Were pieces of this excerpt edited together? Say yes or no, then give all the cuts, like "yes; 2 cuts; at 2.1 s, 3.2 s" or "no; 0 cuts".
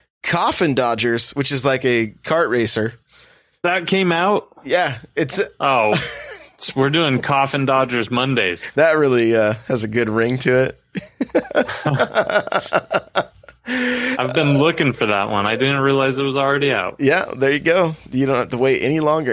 yes; 1 cut; at 8.7 s